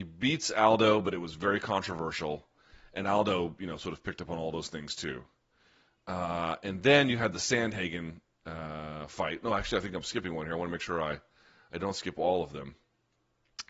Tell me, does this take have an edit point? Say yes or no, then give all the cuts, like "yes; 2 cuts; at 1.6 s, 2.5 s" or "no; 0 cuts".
no; 0 cuts